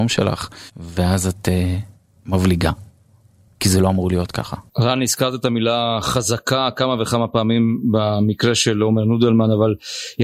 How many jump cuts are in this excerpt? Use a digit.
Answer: 1